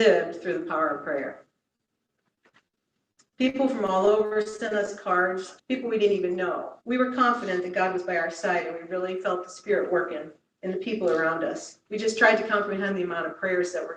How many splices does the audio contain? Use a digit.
3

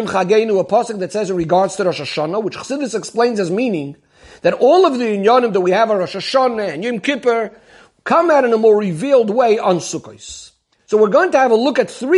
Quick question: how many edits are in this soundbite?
0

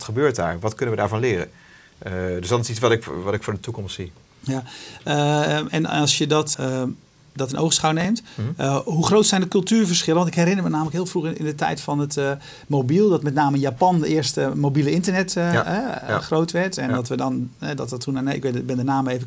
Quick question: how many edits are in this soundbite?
1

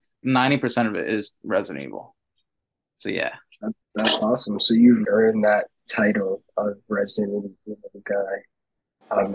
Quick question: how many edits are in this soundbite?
2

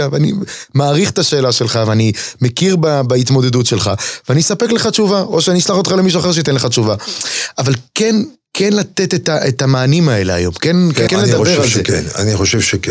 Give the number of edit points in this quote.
1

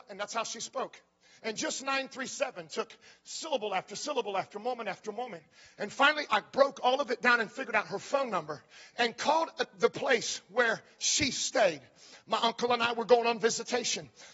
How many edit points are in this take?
1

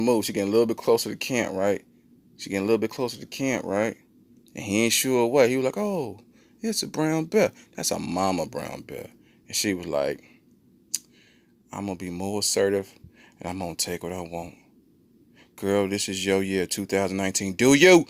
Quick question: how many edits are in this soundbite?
0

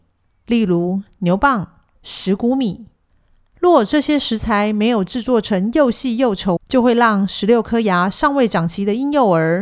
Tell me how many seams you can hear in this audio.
2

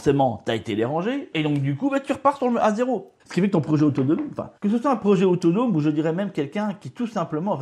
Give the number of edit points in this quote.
2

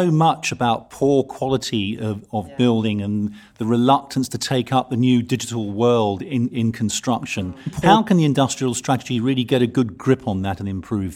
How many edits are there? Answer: 0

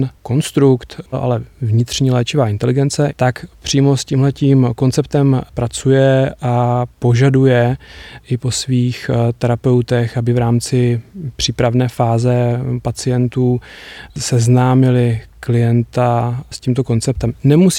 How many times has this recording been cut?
2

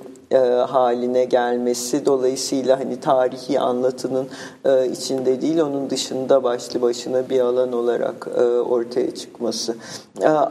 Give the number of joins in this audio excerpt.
1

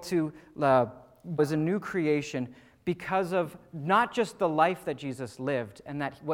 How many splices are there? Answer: 1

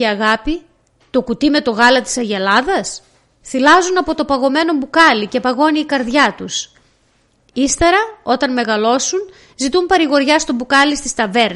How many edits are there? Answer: 0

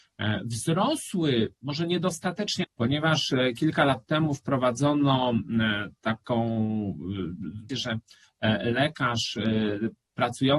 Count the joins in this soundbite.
2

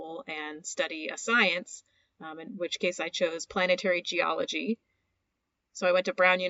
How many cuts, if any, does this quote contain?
0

